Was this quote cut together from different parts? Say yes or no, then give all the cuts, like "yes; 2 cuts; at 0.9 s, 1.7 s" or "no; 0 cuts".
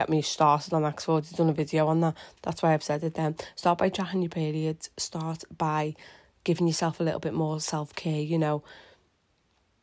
no; 0 cuts